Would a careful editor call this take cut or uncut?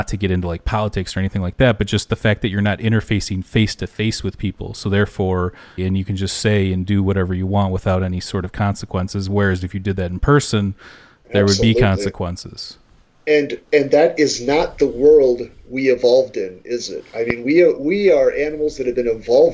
cut